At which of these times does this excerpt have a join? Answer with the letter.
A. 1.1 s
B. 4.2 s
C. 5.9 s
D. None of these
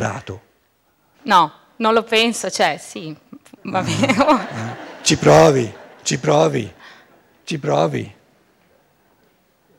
A